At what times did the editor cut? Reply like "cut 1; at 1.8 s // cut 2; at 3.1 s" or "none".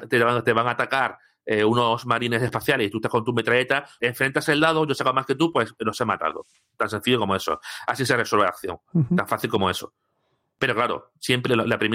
cut 1; at 4.0 s